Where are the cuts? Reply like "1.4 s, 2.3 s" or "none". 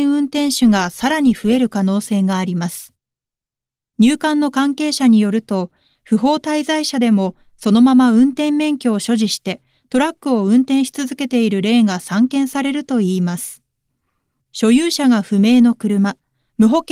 none